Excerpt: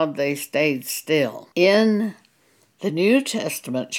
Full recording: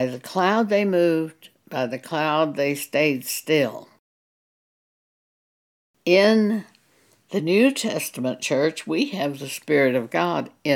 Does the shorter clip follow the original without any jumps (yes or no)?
no